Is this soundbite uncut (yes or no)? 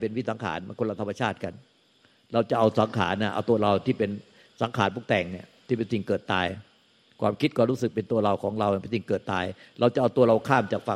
yes